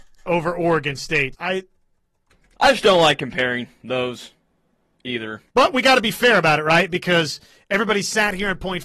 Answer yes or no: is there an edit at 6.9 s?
no